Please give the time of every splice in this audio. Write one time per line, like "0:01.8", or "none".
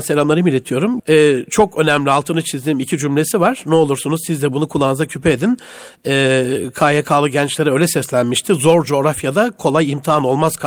0:01.0